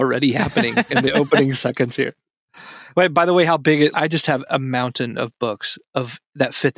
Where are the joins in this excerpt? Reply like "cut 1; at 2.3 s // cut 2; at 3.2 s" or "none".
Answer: cut 1; at 3.9 s